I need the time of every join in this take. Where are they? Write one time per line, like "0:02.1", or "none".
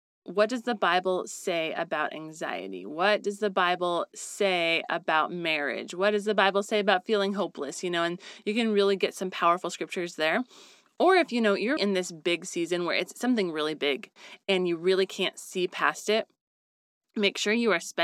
0:11.8